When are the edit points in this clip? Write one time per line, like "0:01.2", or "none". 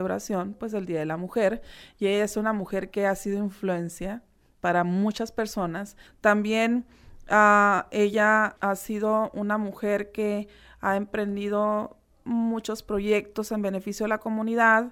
0:06.1
0:08.6